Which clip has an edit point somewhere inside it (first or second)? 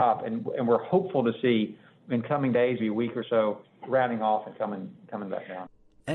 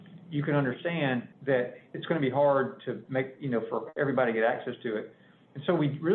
first